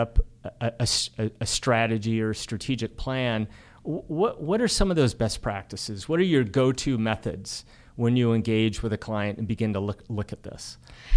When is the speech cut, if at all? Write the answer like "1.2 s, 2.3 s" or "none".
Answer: none

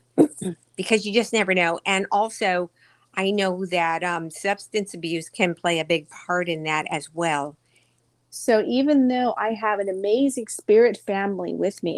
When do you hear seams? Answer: 8.1 s

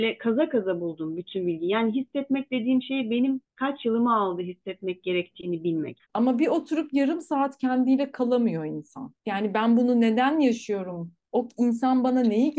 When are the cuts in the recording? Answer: 6.0 s

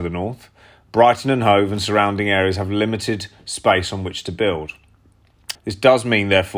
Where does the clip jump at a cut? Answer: 5.6 s

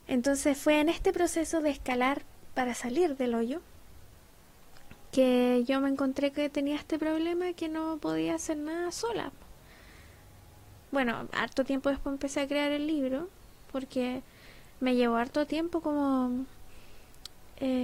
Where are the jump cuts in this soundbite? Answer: 10.8 s

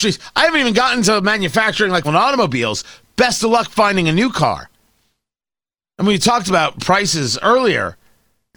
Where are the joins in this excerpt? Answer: 2.0 s, 7.4 s

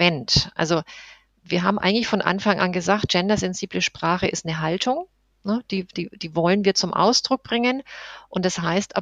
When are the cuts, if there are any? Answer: none

